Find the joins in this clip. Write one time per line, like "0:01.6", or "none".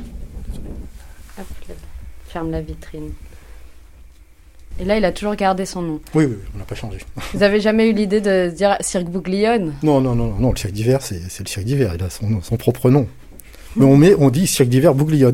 0:04.7